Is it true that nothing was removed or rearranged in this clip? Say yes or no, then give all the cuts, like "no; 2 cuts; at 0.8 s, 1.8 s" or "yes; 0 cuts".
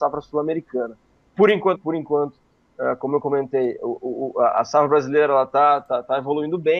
no; 1 cut; at 1.8 s